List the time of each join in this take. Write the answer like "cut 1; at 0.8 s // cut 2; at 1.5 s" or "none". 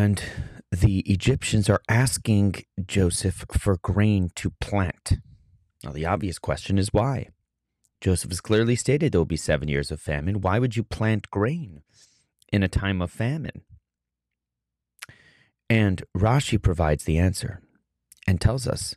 none